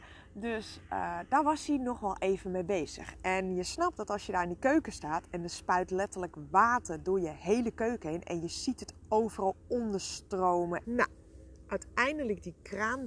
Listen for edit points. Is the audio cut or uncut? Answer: cut